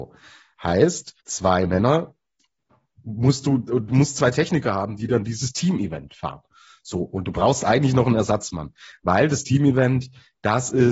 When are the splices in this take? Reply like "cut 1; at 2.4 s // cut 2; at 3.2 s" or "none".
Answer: cut 1; at 1.2 s